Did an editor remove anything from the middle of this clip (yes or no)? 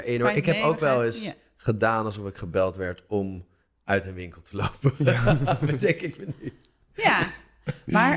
no